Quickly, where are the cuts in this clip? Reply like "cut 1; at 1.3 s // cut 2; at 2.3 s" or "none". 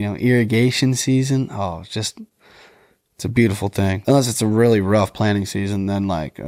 cut 1; at 4.0 s